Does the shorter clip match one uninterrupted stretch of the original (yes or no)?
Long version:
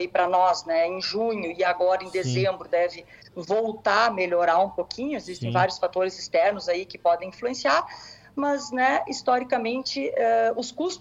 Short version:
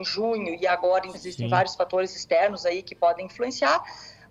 no